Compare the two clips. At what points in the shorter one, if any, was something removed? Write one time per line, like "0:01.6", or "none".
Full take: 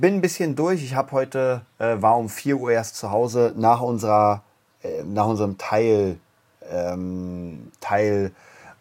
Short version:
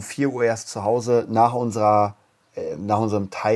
none